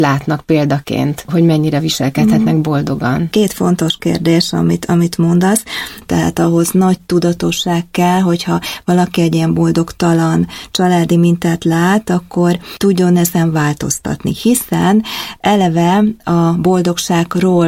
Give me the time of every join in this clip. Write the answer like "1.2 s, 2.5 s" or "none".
6.0 s